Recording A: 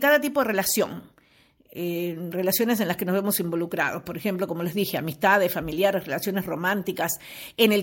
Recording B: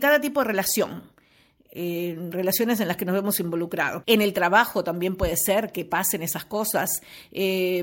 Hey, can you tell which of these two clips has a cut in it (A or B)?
B